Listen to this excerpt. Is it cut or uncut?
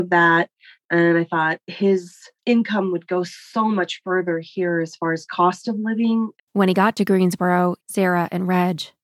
cut